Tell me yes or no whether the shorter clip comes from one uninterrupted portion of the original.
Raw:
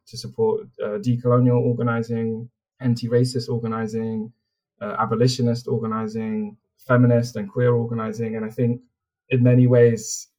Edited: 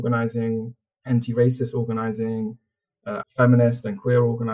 no